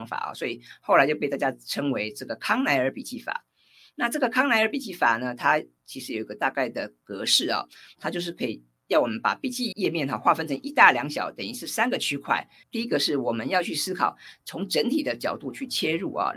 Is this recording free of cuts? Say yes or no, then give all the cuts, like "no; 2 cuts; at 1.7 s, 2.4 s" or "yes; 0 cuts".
no; 2 cuts; at 9.7 s, 12.6 s